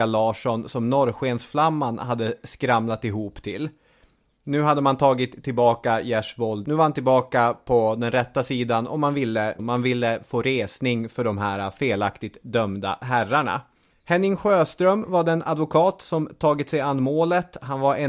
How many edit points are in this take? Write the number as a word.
one